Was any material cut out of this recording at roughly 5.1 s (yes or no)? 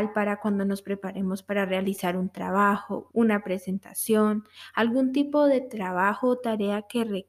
no